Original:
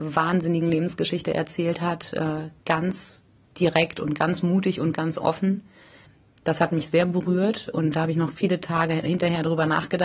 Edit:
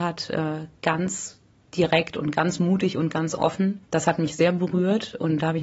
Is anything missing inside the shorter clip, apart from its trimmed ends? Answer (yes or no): yes